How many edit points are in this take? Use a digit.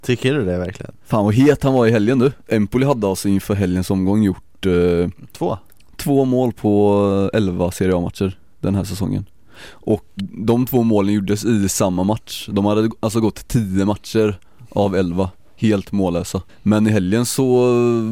1